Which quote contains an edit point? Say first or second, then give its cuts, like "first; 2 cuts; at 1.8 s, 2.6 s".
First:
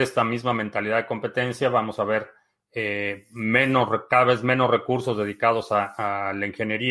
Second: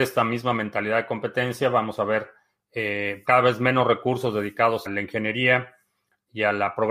second; 2 cuts; at 3.2 s, 4.9 s